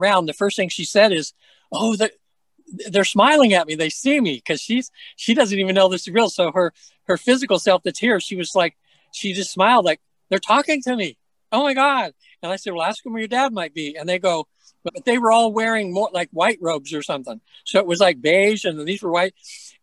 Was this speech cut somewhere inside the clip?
yes; 1 cut; at 14.9 s

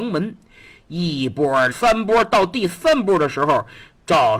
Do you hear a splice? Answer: yes; 1 cut; at 1.7 s

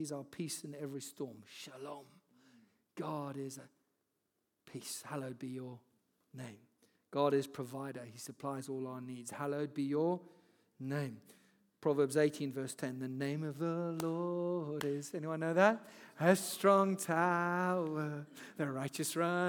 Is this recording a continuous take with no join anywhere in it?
yes; 0 cuts

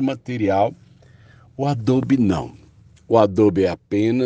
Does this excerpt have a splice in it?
no; 0 cuts

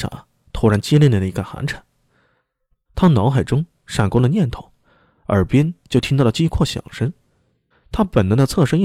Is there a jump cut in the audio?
yes; 2 cuts; at 2.9 s, 7.7 s

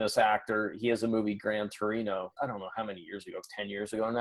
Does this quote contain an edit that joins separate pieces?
yes; 1 cut; at 2.4 s

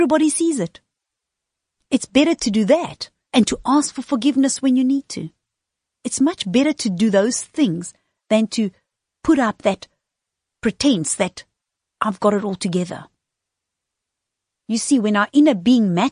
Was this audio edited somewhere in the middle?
no; 0 cuts

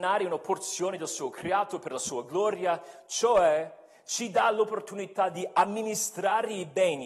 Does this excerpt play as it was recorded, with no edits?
yes; 0 cuts

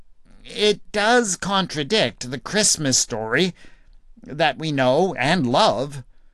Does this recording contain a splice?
no; 0 cuts

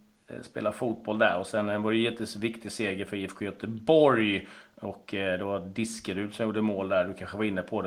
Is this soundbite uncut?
yes; 0 cuts

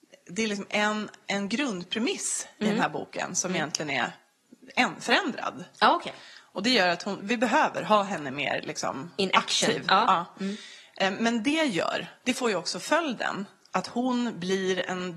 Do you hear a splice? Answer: yes; 1 cut; at 7.2 s

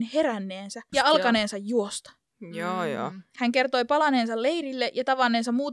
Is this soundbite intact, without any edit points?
no; 1 cut; at 0.9 s

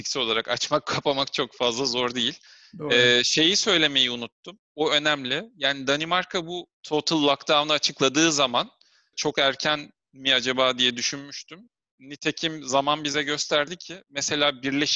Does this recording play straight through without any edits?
yes; 0 cuts

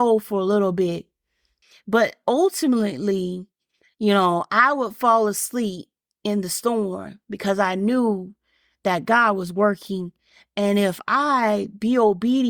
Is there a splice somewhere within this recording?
no; 0 cuts

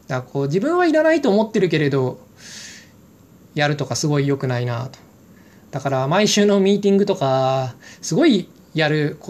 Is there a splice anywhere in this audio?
no; 0 cuts

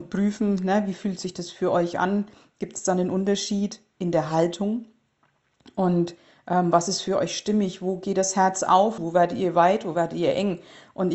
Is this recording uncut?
no; 1 cut; at 9.0 s

